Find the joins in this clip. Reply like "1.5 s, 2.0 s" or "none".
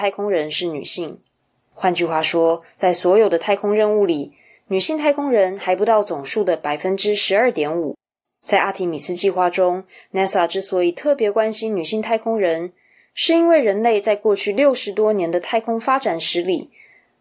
8.3 s